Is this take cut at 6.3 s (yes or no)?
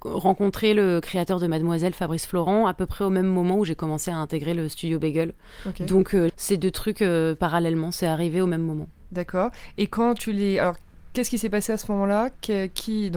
yes